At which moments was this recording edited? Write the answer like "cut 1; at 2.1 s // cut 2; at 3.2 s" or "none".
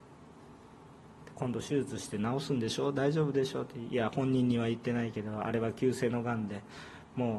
cut 1; at 1.2 s